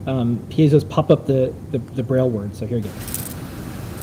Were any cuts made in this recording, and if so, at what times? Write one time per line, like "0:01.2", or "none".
0:01.7